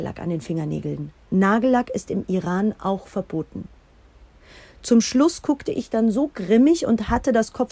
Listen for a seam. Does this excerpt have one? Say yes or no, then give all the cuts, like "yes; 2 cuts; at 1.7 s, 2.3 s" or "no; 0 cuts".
no; 0 cuts